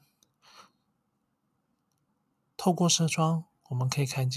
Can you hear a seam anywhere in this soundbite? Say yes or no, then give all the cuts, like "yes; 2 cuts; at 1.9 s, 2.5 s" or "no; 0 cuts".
no; 0 cuts